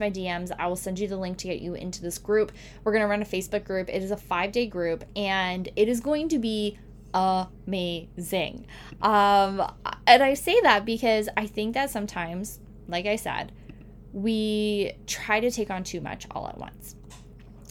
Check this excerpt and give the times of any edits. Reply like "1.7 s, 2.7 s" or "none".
none